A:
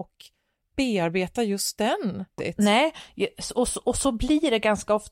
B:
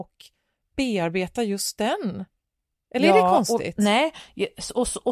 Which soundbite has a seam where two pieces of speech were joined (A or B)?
A